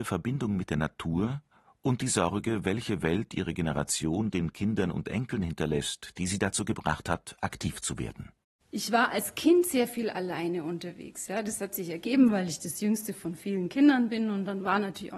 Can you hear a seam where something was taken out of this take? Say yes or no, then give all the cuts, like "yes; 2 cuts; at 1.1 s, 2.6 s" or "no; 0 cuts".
no; 0 cuts